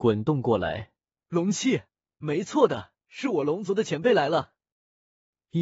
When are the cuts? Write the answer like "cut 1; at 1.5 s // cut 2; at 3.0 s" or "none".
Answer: cut 1; at 1.1 s // cut 2; at 3.0 s